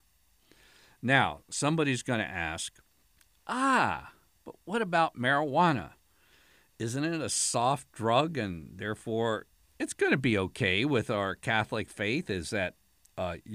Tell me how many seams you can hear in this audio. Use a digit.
0